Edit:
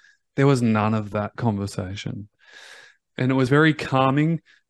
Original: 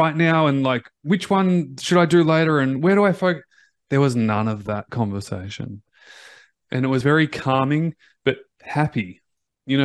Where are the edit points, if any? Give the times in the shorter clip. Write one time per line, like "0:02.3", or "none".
none